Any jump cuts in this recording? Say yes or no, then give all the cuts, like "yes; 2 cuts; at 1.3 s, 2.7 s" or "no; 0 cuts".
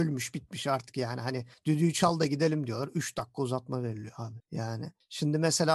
no; 0 cuts